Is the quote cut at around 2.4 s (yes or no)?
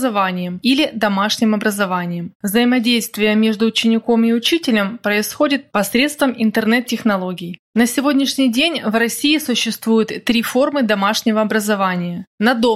yes